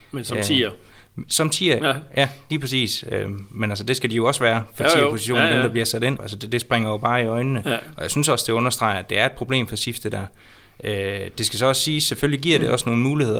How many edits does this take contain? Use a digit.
2